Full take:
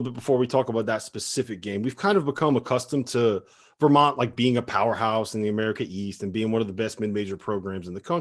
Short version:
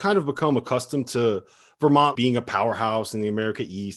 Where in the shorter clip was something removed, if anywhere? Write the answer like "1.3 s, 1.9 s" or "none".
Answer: 2.2 s